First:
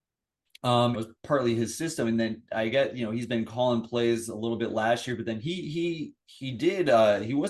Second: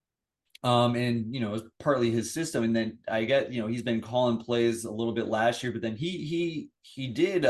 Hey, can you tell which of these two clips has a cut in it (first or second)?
first